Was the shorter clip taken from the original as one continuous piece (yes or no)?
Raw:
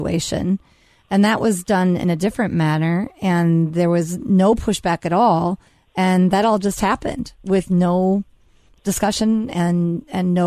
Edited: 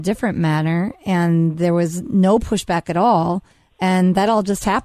yes